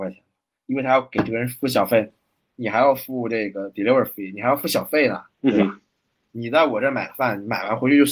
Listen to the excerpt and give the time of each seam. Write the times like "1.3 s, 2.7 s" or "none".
2.4 s, 5.3 s